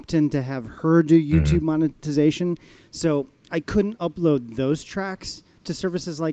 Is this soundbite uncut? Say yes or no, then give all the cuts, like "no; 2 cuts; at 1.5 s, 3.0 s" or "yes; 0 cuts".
yes; 0 cuts